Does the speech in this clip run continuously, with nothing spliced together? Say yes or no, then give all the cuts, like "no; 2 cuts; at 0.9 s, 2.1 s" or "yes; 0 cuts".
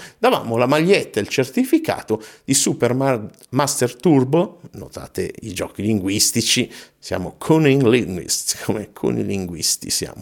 yes; 0 cuts